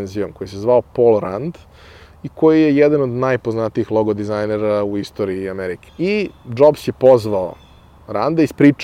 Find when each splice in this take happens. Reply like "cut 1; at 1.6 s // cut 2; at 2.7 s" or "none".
cut 1; at 5.9 s